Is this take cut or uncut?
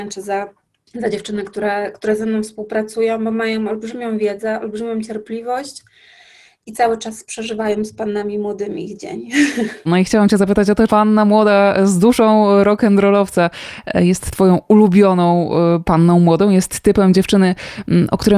cut